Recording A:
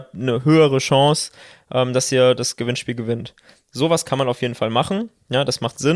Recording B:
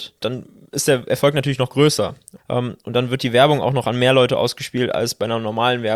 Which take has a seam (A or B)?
B